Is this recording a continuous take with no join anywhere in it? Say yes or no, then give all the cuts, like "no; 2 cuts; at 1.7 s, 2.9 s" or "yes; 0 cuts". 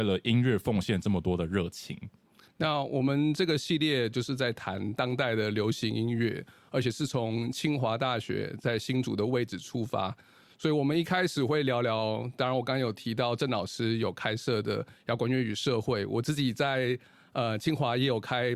yes; 0 cuts